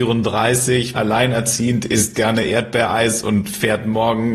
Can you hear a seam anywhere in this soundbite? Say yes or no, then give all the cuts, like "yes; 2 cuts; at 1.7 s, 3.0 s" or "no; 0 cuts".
yes; 1 cut; at 0.9 s